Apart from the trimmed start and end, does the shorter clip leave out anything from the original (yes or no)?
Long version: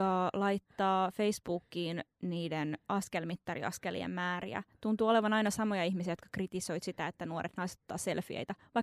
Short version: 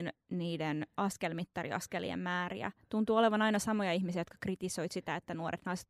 no